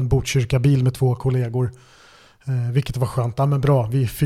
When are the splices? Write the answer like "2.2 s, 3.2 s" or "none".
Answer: none